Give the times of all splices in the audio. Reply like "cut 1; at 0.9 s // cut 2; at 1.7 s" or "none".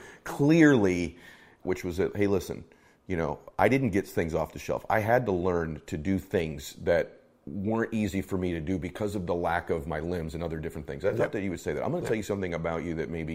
cut 1; at 1.6 s